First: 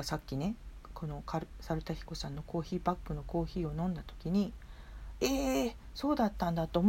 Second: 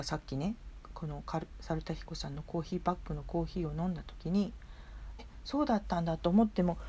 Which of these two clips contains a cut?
second; 1 cut; at 5.2 s

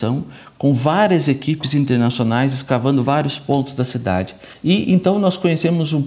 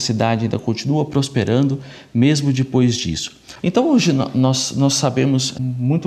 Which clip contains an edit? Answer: second; 1 cut; at 3.6 s

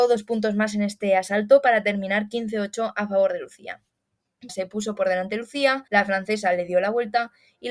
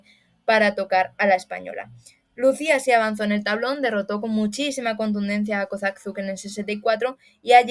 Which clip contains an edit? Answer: first; 2 cuts; at 4.5 s, 5.9 s

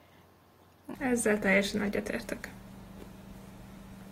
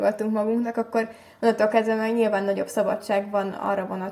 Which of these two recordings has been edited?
first; 1 cut; at 0.9 s

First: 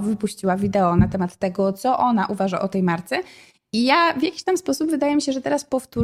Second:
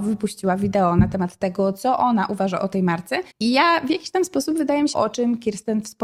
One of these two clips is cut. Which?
second; 2 cuts; at 3.3 s, 4.9 s

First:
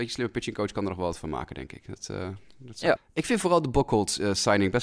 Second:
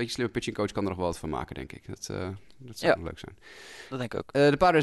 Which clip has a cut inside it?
first; 1 cut; at 3.0 s

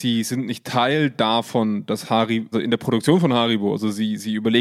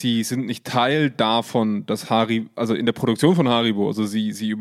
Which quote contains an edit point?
first; 1 cut; at 2.5 s

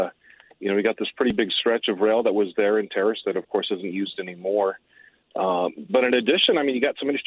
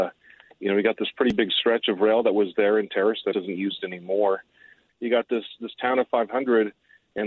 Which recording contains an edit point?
second; 2 cuts; at 3.3 s, 4.9 s

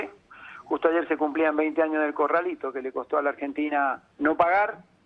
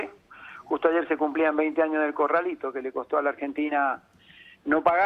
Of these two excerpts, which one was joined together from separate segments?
first; 1 cut; at 4.1 s

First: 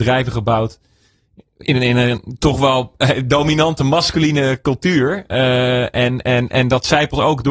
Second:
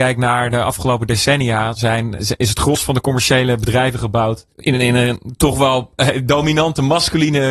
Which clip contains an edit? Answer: second; 2 cuts; at 2.2 s, 4.5 s

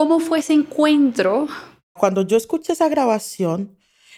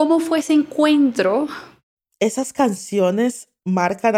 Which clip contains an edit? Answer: first; 1 cut; at 2.0 s

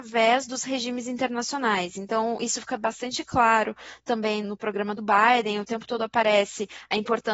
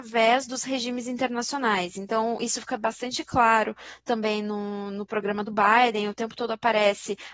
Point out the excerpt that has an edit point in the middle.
first; 1 cut; at 4.4 s

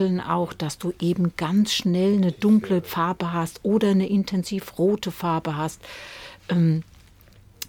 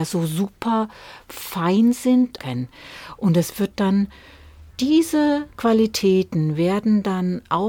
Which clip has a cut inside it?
second; 2 cuts; at 2.4 s, 4.7 s

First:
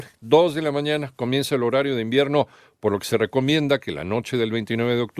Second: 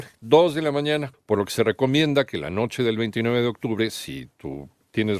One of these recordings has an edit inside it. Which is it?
second; 1 cut; at 1.1 s

